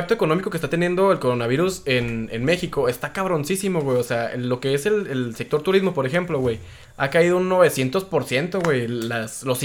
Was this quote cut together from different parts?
no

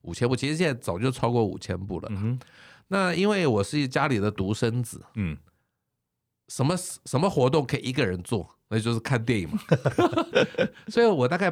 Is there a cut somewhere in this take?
no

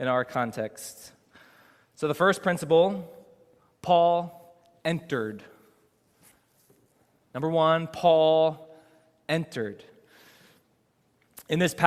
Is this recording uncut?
yes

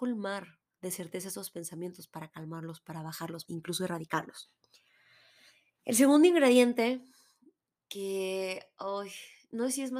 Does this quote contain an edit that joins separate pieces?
yes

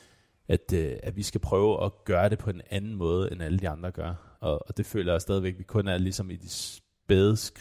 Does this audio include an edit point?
yes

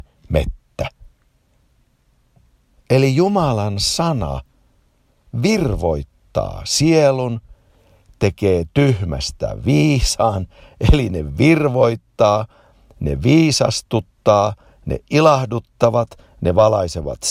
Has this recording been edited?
no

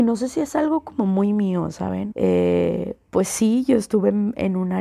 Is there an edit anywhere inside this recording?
yes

